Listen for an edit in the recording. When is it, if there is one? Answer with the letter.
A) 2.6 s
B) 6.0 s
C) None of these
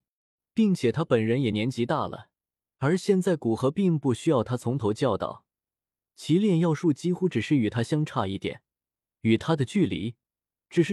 A